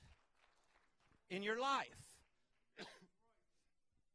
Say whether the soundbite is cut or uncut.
uncut